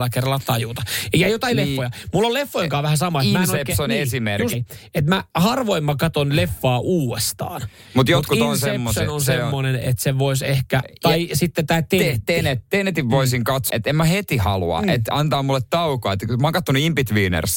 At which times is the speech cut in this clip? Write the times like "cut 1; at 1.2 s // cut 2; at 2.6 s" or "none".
cut 1; at 4.5 s // cut 2; at 13.7 s